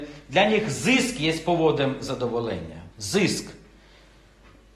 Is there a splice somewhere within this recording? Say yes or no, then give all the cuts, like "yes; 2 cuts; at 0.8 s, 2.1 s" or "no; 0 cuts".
yes; 1 cut; at 2.9 s